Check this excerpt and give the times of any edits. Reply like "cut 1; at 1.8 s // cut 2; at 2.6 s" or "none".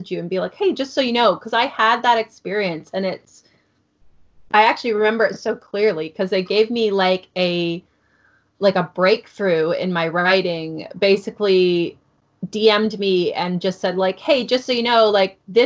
none